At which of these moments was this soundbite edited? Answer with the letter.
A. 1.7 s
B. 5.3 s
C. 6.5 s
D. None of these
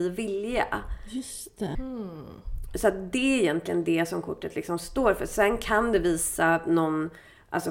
A